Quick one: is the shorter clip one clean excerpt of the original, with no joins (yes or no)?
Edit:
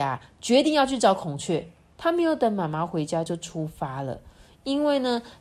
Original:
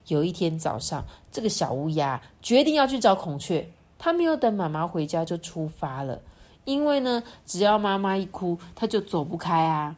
yes